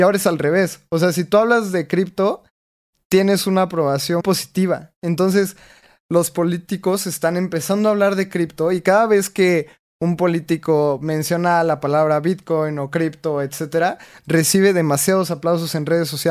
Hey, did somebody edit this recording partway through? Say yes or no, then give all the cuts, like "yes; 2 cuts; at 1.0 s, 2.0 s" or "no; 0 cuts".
yes; 1 cut; at 4.2 s